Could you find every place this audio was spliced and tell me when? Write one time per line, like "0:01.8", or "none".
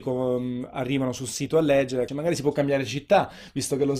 0:02.1